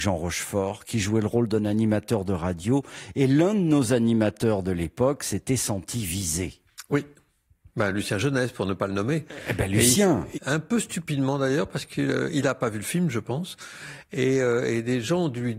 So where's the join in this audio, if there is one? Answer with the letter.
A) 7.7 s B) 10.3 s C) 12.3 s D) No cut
B